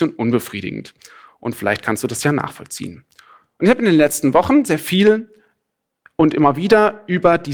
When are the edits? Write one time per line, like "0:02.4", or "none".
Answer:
none